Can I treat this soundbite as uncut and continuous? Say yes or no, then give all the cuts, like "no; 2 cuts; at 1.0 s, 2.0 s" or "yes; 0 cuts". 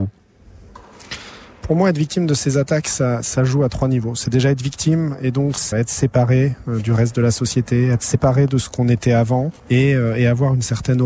no; 2 cuts; at 5.7 s, 9.6 s